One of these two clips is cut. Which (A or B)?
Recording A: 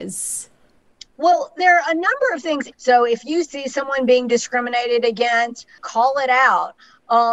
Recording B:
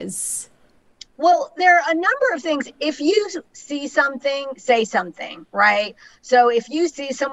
A